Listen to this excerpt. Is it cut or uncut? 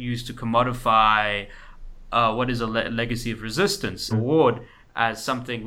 cut